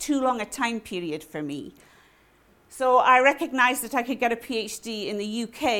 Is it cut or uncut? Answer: uncut